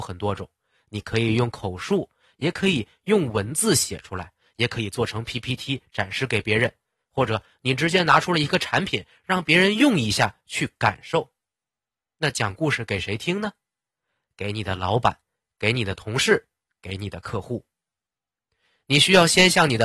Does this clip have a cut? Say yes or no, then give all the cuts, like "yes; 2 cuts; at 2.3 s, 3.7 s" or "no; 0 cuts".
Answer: no; 0 cuts